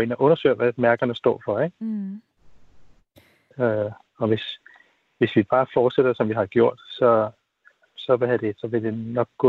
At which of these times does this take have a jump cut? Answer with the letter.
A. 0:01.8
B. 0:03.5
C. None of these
B